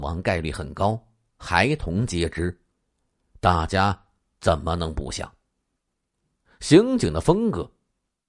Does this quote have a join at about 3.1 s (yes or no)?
no